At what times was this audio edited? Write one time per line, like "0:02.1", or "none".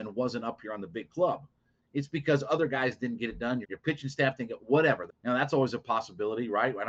0:03.6
0:05.1